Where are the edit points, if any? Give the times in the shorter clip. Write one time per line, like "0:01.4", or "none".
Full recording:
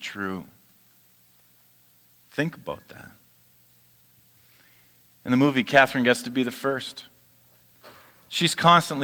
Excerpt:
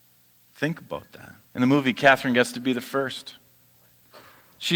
0:01.5